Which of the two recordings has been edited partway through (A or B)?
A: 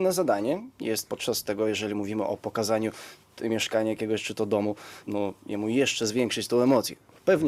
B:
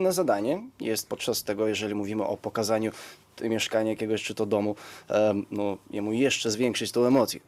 A